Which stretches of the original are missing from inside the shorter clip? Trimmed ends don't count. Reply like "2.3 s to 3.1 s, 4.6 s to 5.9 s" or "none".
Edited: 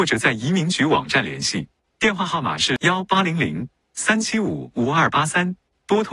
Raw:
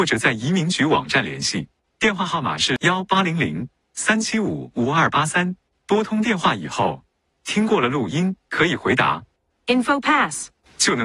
none